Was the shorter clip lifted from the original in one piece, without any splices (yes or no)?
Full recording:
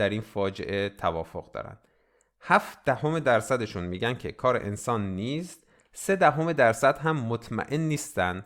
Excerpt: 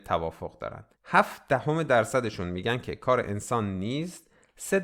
no